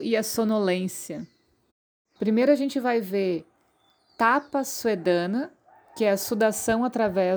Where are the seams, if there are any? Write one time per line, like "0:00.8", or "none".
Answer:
0:02.2